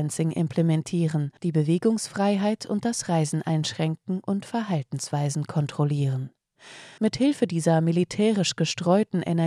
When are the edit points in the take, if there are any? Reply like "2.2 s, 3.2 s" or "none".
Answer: 1.4 s, 7.0 s